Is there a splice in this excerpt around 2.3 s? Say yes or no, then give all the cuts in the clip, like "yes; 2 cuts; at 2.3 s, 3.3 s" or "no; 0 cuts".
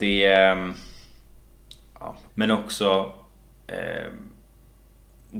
yes; 1 cut; at 2.3 s